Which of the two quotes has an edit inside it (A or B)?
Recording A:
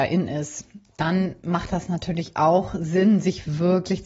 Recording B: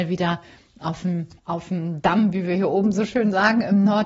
B